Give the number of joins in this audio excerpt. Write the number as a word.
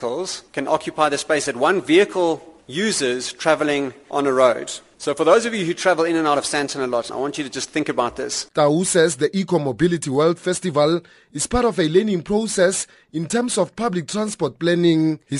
one